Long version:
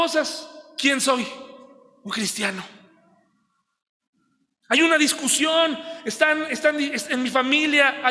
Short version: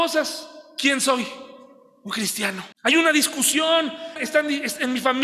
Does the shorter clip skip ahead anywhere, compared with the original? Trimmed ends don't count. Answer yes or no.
yes